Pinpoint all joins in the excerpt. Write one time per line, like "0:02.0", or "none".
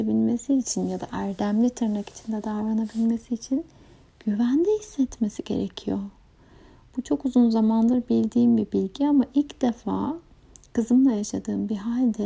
none